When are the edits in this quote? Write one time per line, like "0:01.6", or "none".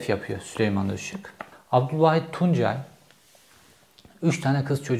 none